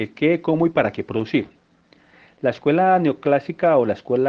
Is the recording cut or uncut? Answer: uncut